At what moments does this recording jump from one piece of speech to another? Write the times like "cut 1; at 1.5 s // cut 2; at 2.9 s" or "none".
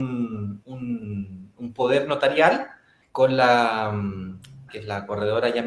cut 1; at 3.0 s // cut 2; at 4.7 s

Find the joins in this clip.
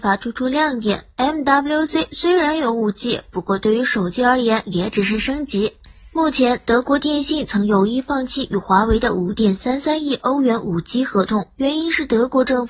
none

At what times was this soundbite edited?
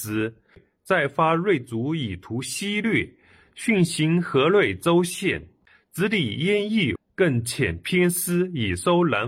cut 1; at 7.0 s

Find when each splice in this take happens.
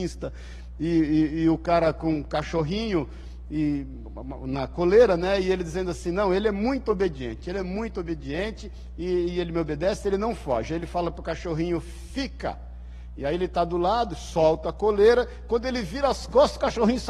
none

